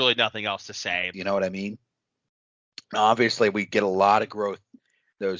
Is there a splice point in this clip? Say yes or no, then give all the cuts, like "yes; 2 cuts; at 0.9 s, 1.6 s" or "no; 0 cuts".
yes; 1 cut; at 1.1 s